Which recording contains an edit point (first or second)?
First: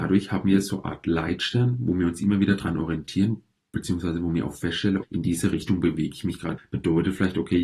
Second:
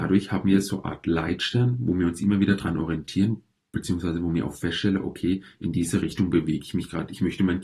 first